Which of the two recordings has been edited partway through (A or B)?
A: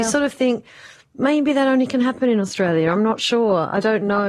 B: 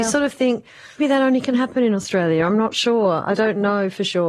B